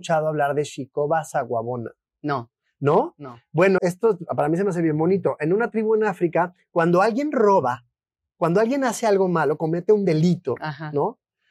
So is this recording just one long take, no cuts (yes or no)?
no